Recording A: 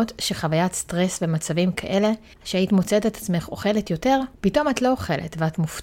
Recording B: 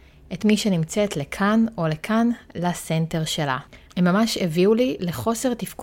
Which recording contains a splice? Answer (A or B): B